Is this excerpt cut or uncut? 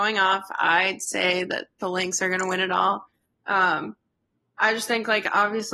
uncut